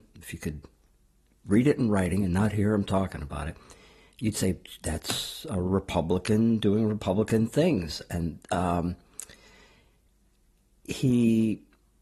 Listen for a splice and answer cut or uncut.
uncut